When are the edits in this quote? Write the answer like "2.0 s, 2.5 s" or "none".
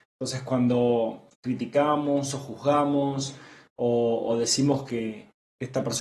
1.3 s